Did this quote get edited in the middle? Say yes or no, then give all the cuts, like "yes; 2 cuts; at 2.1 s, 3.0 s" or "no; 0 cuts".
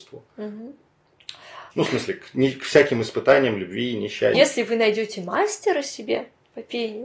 yes; 2 cuts; at 1.7 s, 4.3 s